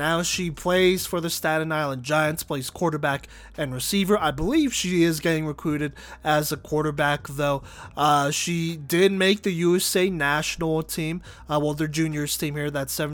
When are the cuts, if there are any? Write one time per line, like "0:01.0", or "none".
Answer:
none